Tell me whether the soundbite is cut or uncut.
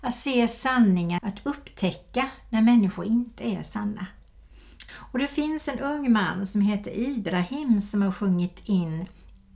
cut